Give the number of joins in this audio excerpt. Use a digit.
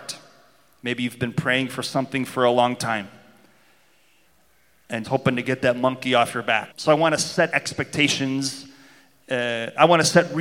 2